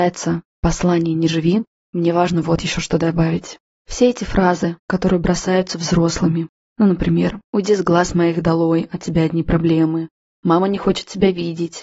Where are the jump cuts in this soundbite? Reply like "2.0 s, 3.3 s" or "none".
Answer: none